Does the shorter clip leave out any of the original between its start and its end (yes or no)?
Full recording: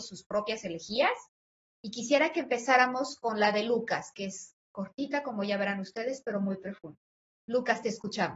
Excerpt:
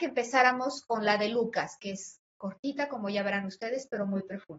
no